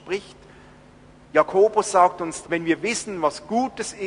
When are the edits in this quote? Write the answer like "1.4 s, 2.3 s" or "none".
2.4 s